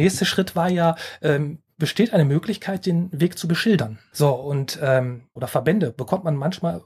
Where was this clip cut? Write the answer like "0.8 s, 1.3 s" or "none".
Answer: 4.1 s, 5.4 s